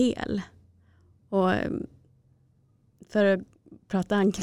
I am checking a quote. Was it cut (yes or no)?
no